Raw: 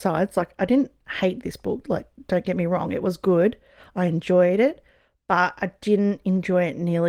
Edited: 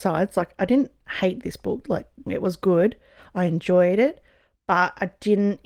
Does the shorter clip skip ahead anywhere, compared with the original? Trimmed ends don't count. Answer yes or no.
yes